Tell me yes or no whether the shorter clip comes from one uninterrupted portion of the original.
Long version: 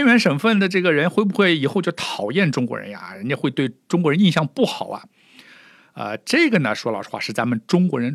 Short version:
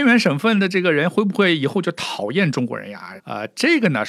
no